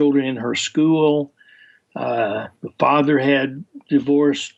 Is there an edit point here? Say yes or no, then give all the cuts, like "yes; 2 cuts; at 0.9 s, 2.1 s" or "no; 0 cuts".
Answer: no; 0 cuts